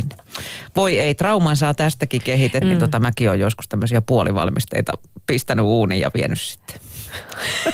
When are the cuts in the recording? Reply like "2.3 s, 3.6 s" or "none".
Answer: 2.6 s